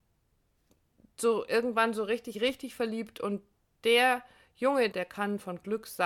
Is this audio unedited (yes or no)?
no